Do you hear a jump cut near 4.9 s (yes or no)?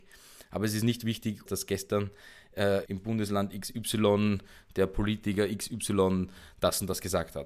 no